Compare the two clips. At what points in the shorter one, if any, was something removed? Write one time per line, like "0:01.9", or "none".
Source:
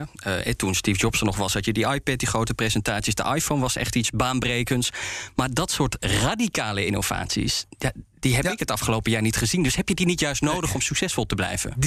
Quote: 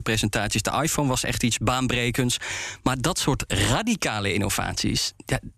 none